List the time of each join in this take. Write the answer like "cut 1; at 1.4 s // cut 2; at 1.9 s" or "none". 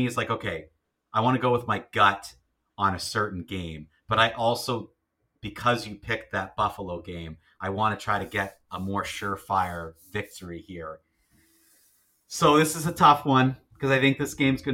none